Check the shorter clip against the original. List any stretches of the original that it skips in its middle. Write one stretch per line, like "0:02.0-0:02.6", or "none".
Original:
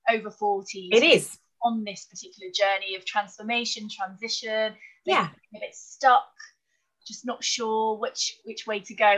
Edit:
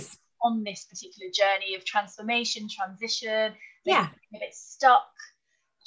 none